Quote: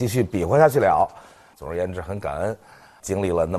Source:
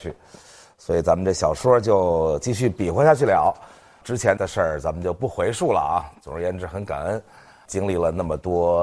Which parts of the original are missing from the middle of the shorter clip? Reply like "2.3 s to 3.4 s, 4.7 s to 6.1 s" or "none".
4.0 s to 6.2 s